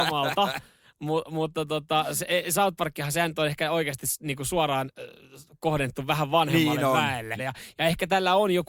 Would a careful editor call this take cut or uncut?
cut